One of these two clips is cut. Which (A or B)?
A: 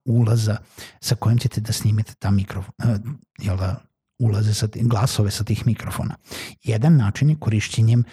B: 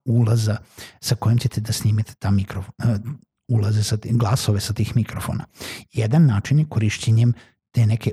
B